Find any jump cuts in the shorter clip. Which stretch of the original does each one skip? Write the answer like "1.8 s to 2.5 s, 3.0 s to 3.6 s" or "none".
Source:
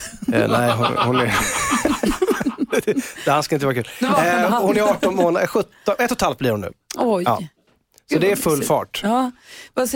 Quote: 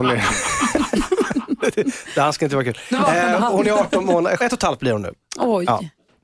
5.5 s to 6.0 s